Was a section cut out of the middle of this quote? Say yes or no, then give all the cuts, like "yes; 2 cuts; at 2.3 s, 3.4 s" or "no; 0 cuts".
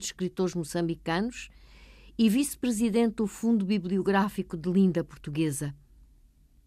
no; 0 cuts